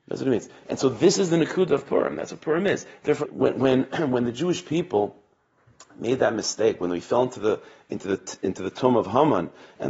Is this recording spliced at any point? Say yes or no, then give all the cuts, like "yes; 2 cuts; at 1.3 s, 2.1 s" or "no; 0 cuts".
yes; 1 cut; at 3.2 s